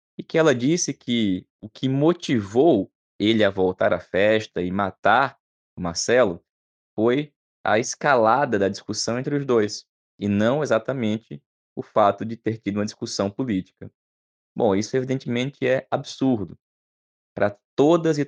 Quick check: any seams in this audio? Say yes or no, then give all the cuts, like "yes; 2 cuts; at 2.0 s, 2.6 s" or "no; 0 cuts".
no; 0 cuts